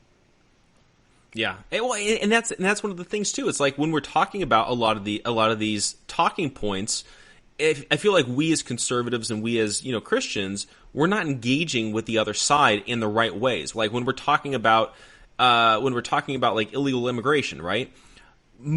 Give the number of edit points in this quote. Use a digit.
1